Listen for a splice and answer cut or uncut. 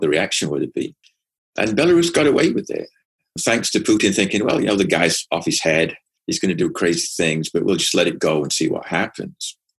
uncut